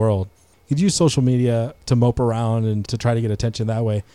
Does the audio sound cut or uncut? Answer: cut